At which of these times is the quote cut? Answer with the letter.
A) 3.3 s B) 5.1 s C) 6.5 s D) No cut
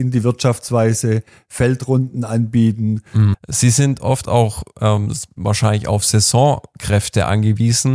A